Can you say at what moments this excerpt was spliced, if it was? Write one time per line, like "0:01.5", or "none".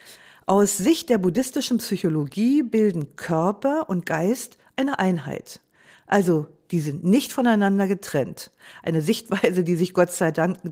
none